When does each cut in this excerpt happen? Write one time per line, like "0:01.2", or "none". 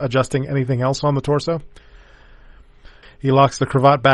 0:03.0